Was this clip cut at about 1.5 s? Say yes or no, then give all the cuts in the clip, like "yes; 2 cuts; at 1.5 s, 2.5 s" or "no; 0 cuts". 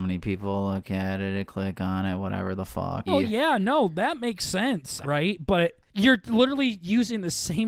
no; 2 cuts; at 3.1 s, 5.0 s